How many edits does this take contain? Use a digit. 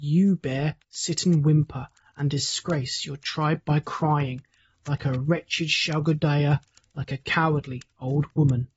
0